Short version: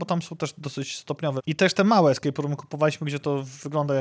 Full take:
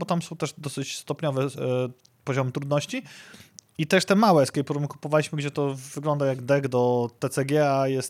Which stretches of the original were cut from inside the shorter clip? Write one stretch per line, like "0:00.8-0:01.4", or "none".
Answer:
0:01.4-0:03.7